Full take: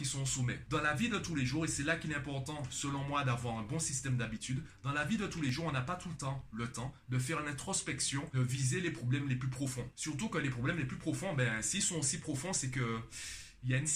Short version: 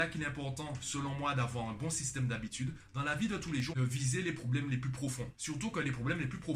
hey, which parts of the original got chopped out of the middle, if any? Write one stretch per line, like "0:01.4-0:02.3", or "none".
0:05.6-0:08.3